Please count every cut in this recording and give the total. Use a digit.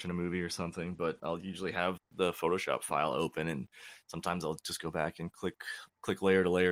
1